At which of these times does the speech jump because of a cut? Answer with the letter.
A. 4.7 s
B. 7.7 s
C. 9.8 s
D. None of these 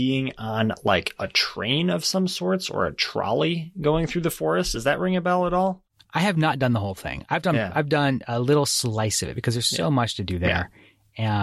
D